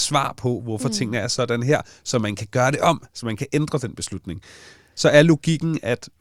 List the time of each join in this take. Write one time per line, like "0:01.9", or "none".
0:04.9